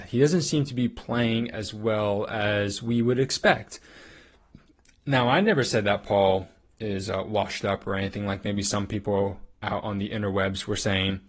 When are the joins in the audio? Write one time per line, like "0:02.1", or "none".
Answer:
none